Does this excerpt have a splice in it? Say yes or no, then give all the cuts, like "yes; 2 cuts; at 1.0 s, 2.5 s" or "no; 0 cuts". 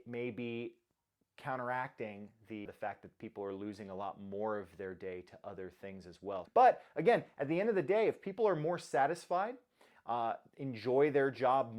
yes; 2 cuts; at 2.7 s, 6.5 s